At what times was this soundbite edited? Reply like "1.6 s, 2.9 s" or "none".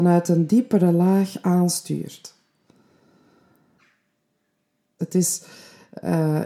5.0 s